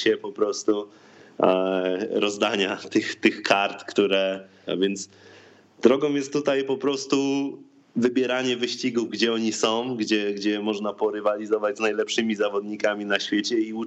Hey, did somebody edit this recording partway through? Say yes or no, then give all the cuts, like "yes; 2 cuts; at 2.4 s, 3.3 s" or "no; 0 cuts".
yes; 1 cut; at 4.7 s